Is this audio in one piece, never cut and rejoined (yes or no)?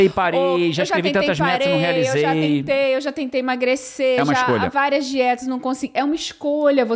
yes